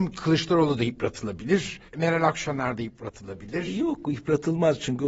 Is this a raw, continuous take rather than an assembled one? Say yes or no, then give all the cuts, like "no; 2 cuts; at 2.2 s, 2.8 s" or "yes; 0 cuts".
no; 1 cut; at 1.9 s